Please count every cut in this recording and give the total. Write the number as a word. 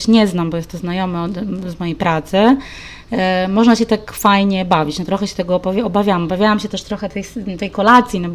zero